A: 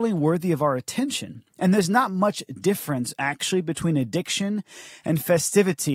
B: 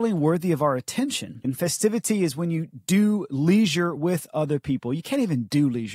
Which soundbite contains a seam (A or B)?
B